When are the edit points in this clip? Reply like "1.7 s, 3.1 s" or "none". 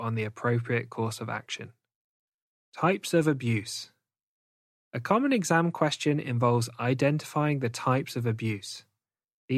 none